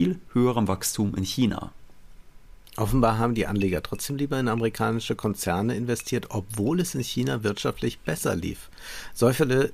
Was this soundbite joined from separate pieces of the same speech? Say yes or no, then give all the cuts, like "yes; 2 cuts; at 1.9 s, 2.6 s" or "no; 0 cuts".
no; 0 cuts